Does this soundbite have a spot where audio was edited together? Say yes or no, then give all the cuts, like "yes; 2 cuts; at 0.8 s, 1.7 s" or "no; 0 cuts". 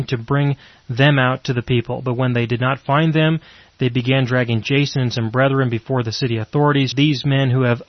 yes; 1 cut; at 6.9 s